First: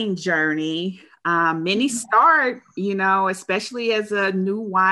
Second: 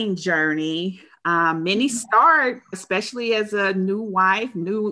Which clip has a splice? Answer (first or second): second